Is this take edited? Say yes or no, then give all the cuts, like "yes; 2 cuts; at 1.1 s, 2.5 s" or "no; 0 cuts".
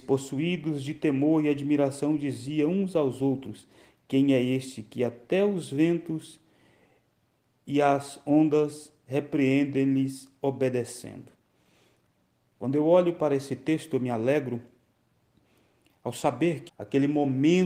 yes; 1 cut; at 16.7 s